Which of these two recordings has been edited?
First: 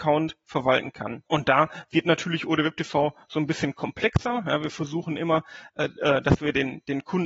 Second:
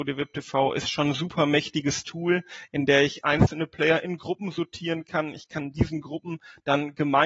first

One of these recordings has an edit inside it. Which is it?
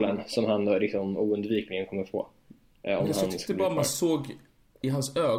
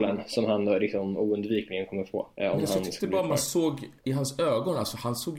second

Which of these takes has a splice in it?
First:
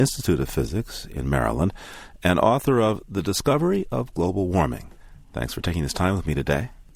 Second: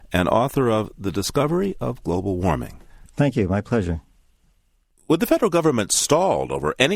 second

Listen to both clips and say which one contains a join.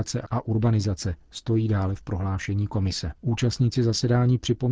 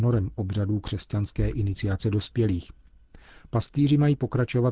first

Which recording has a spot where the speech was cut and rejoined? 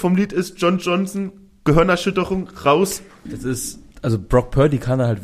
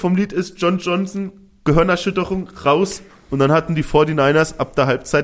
first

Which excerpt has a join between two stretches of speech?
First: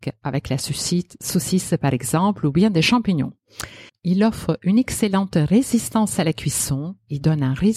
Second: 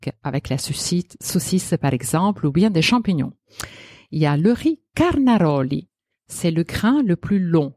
first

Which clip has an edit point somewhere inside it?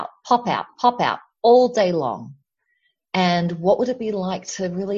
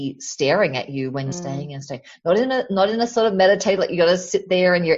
second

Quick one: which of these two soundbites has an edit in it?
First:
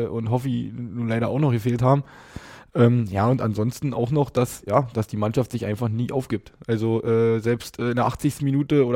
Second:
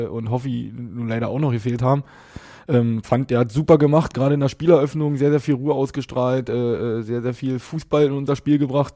first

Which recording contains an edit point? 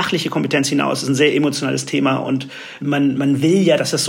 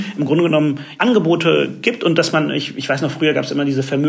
first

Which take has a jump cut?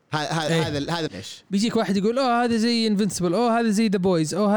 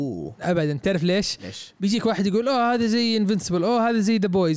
first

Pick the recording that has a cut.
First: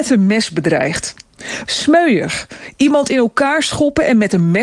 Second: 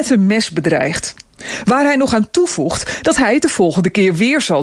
first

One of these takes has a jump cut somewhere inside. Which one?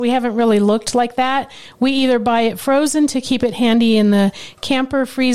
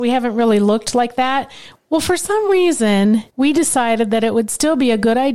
second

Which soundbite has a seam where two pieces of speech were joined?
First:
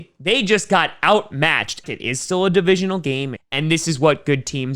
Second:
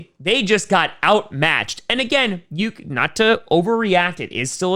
first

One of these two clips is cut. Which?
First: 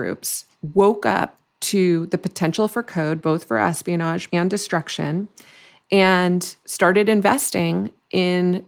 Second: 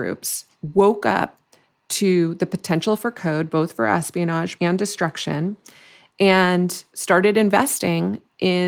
first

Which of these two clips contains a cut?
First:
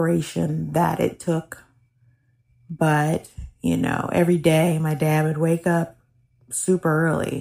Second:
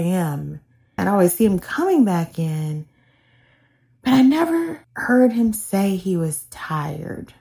second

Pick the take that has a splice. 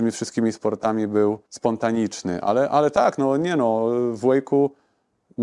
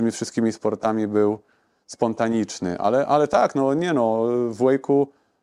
first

